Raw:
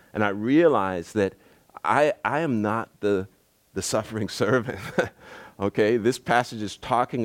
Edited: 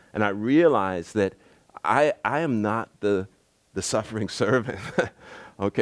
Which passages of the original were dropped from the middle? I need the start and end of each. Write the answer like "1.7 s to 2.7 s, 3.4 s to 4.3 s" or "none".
none